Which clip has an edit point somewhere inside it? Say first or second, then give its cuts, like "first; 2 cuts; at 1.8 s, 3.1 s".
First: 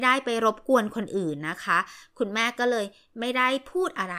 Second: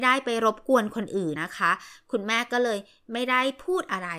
second; 1 cut; at 1.4 s